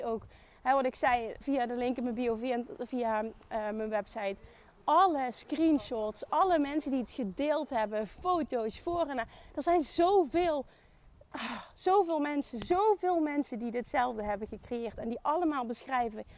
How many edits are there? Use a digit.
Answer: 1